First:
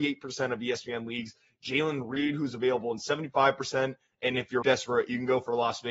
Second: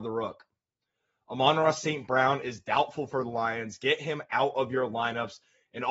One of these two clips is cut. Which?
first; 1 cut; at 4.6 s

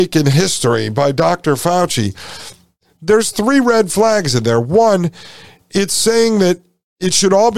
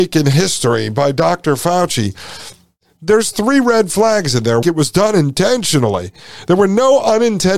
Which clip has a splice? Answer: second; 1 cut; at 4.6 s

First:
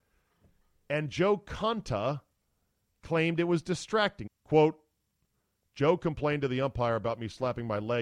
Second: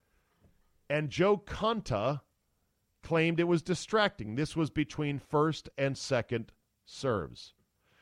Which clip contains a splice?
first; 1 cut; at 4.3 s

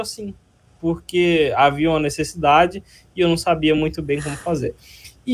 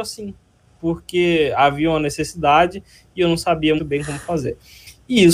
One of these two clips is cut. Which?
second; 1 cut; at 3.8 s

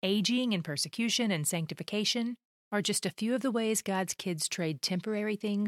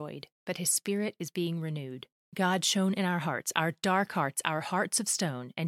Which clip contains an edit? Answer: second; 1 cut; at 2.2 s

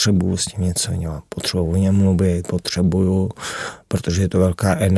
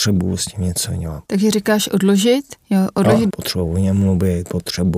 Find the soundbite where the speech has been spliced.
second; 2 cuts; at 1.3 s, 3.3 s

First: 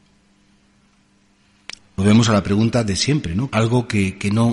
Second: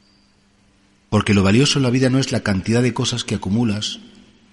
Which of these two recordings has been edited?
first; 2 cuts; at 1.8 s, 3.5 s

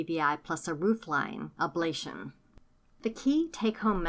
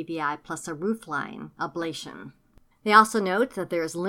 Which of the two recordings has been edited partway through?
second; 1 cut; at 2.7 s

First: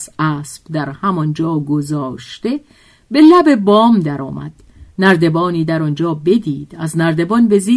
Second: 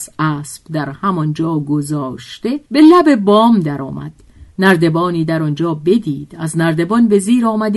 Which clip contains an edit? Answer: second; 1 cut; at 2.7 s

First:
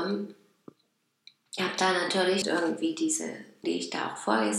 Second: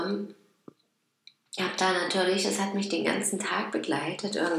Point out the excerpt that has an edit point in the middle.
first; 2 cuts; at 2.4 s, 3.6 s

